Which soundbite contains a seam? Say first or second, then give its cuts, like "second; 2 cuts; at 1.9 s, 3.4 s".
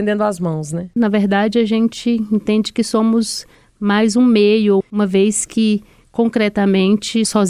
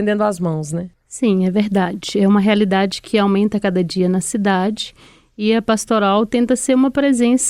first; 2 cuts; at 1.0 s, 4.8 s